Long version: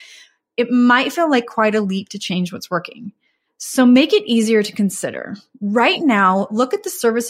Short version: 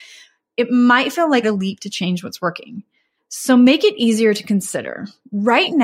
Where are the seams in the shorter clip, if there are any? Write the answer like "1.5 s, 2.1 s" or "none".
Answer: 1.4 s